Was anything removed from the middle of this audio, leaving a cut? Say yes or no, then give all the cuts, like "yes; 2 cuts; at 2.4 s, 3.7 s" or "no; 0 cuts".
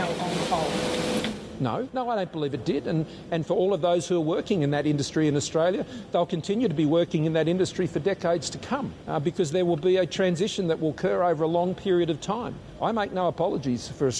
no; 0 cuts